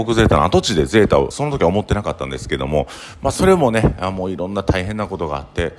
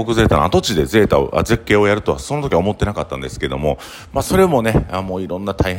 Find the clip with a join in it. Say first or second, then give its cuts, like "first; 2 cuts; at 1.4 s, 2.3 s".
first; 1 cut; at 1.3 s